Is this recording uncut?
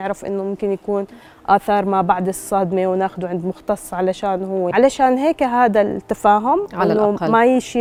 no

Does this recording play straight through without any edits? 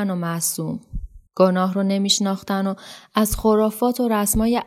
no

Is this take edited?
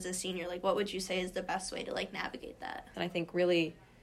yes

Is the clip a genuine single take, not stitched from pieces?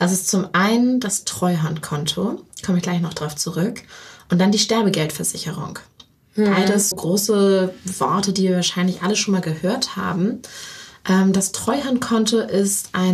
no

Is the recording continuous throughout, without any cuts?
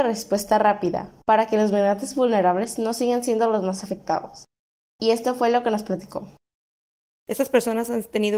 no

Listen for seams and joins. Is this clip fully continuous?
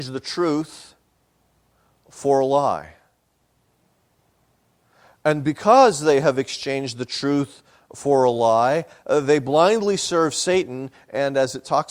yes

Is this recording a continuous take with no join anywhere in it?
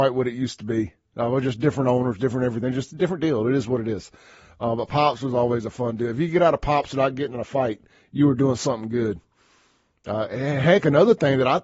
yes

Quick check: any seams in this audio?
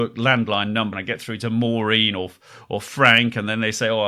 yes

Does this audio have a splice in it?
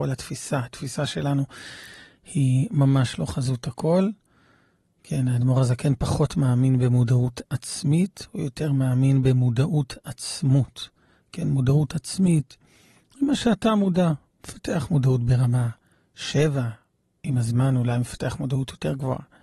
no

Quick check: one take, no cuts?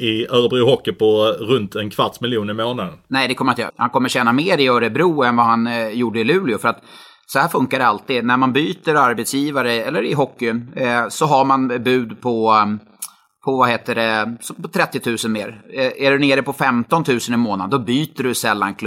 no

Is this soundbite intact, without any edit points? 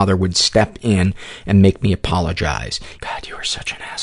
no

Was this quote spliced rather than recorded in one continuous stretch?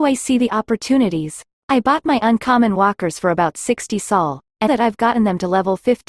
yes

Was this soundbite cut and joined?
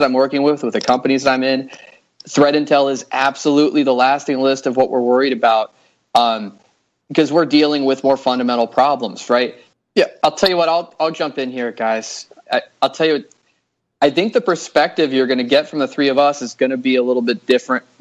yes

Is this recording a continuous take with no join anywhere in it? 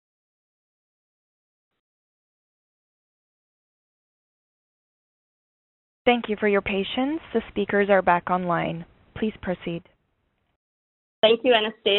yes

